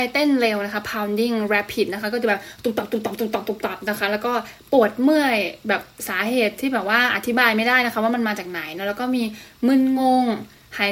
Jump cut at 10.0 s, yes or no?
no